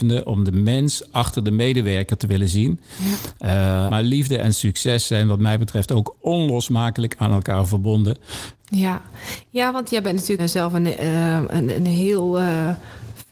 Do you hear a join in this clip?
yes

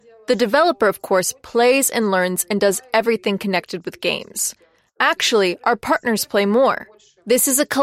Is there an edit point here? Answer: no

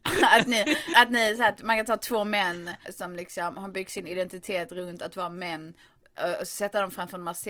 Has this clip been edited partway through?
yes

